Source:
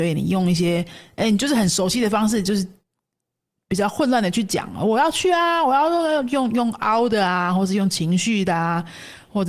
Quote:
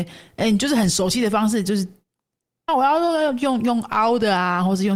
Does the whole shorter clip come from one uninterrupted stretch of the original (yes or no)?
no